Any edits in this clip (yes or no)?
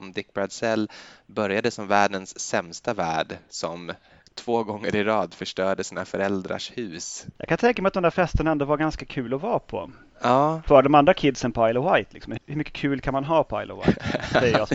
yes